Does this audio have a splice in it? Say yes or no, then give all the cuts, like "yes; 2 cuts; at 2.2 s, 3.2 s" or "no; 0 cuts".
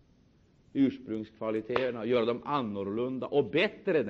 no; 0 cuts